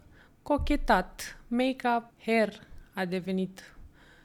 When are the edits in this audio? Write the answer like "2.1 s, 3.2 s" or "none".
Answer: 2.1 s